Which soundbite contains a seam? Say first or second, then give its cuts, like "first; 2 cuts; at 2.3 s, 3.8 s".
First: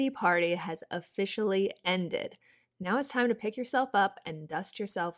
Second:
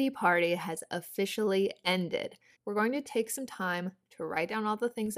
second; 1 cut; at 2.6 s